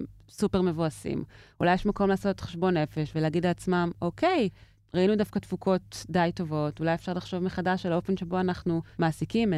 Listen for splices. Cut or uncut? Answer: uncut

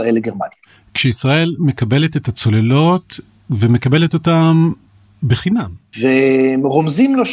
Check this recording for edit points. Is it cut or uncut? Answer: cut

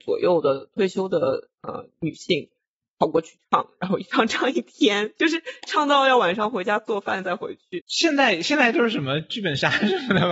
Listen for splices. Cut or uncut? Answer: cut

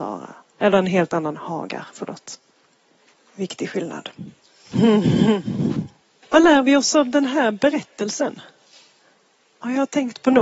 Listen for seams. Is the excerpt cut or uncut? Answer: uncut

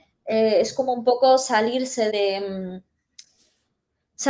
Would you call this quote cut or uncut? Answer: cut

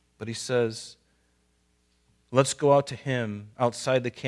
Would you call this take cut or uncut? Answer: uncut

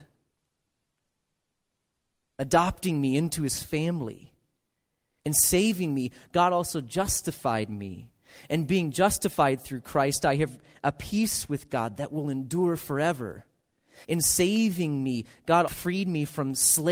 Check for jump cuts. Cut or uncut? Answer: cut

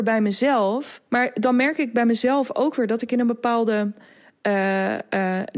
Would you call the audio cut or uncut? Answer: cut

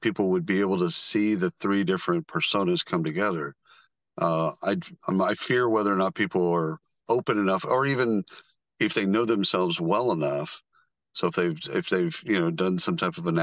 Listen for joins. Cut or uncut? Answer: uncut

